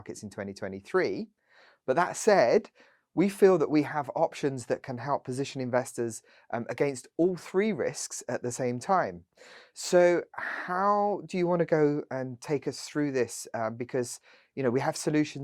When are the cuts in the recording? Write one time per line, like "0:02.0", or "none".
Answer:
none